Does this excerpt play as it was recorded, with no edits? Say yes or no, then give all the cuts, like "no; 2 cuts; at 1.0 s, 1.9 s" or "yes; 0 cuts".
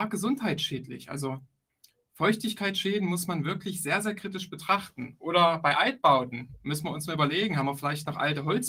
yes; 0 cuts